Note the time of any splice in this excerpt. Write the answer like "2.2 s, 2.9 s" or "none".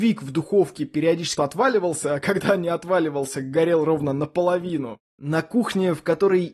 1.4 s, 5.1 s